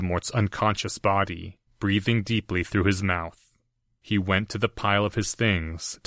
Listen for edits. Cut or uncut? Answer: uncut